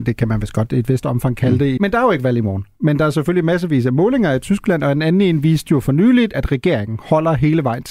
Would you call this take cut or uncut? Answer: cut